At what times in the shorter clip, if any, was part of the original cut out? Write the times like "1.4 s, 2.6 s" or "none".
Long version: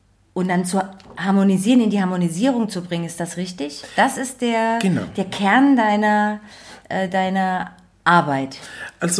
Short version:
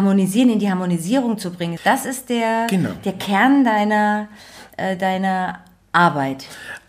1.8 s

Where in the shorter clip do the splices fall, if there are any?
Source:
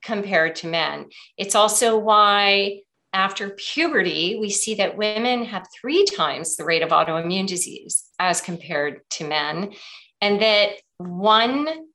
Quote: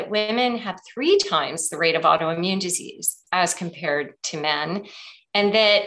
none

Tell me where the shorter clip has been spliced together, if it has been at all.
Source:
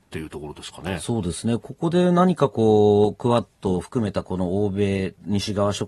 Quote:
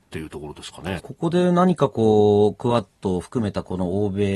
1.0 s

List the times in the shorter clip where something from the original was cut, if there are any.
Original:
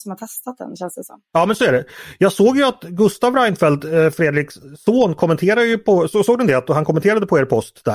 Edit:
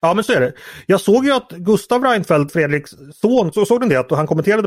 2.5 s, 3.5 s

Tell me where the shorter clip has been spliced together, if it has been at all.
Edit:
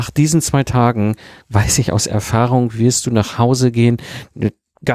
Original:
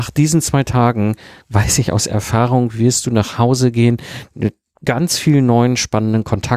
none

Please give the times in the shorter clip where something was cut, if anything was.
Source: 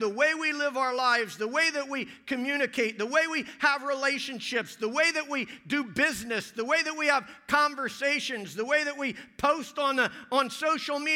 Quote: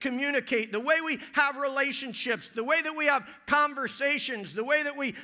2.5 s

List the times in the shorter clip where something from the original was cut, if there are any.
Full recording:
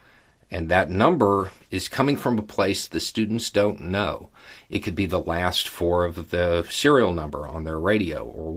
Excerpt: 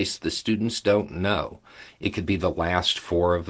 none

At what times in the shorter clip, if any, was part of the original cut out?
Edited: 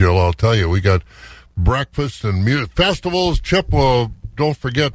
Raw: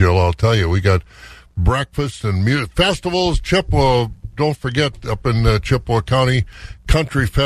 none

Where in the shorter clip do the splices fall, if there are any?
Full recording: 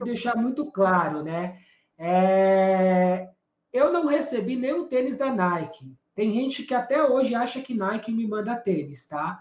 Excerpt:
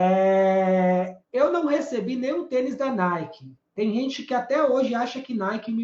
1.2 s

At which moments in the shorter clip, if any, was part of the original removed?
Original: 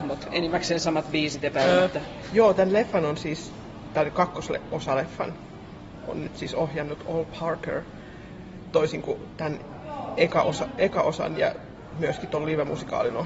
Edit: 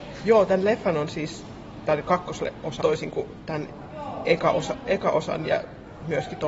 2.8 s

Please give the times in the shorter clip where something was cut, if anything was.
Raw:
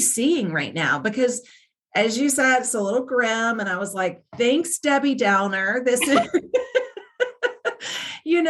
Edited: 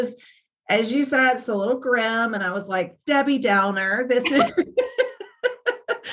3.0 s

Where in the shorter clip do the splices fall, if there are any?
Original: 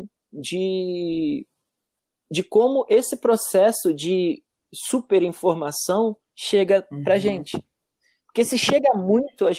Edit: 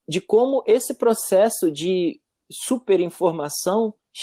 none

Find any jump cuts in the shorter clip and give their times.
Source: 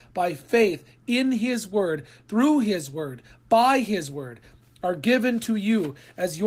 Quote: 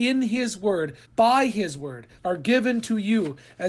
1.0 s, 2.2 s

